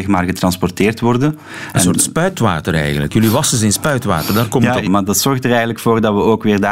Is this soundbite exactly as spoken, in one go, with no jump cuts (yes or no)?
no